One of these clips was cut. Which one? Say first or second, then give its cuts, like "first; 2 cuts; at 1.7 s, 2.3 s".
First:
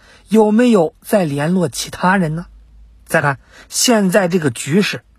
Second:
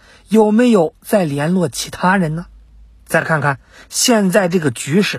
first; 1 cut; at 3.2 s